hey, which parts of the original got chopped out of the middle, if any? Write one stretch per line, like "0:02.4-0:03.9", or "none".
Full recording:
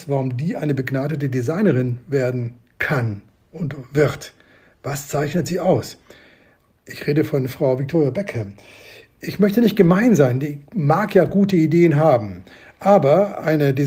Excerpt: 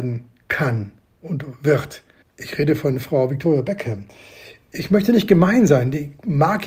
0:04.5-0:06.7